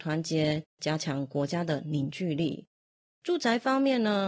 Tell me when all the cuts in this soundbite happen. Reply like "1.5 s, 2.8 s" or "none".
none